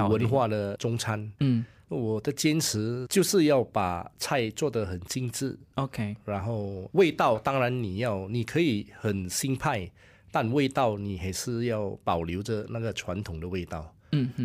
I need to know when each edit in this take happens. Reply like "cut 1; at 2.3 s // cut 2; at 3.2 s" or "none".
none

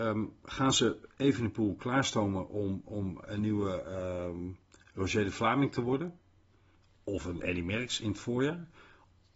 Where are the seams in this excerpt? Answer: cut 1; at 3.2 s

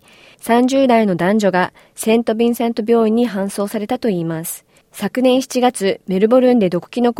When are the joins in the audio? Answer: cut 1; at 4.8 s

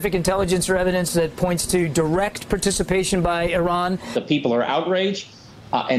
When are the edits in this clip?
cut 1; at 4.1 s

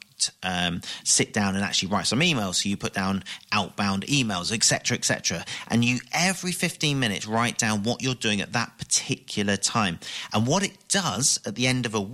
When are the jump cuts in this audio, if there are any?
none

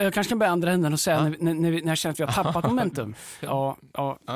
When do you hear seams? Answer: cut 1; at 3.4 s

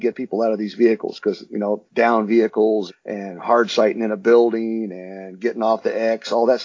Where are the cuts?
cut 1; at 1.9 s // cut 2; at 2.9 s

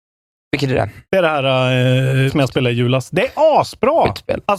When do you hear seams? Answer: cut 1; at 1.0 s // cut 2; at 2.3 s

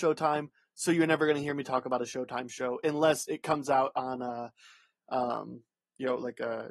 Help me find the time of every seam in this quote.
none

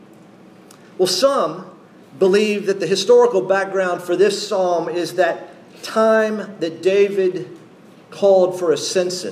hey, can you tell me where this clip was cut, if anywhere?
cut 1; at 2.0 s

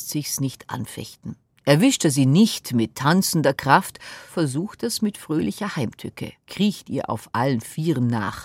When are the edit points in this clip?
cut 1; at 4.3 s // cut 2; at 6.4 s

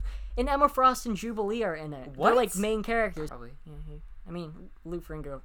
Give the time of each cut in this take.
cut 1; at 3.3 s

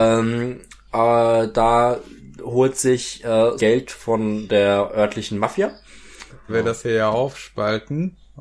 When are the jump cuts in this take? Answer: cut 1; at 3.6 s // cut 2; at 6.5 s

